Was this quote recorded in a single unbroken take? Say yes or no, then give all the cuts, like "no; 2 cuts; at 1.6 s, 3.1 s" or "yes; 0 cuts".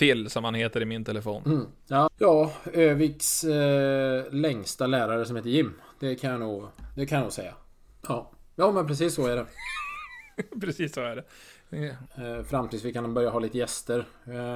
no; 3 cuts; at 2.1 s, 8.0 s, 12.1 s